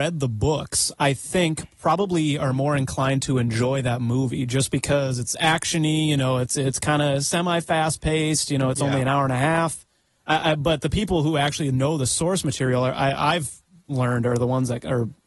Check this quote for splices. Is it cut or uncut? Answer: uncut